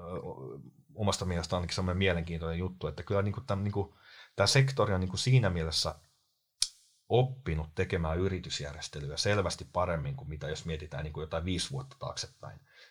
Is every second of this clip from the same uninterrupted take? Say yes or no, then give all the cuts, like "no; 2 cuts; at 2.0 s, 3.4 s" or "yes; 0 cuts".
yes; 0 cuts